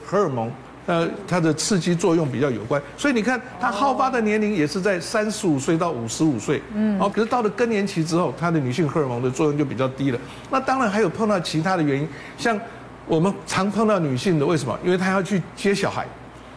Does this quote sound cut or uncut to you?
cut